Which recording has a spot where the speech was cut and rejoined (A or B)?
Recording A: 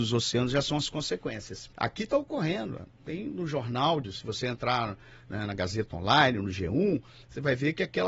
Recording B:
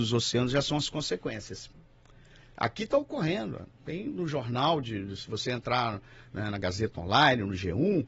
A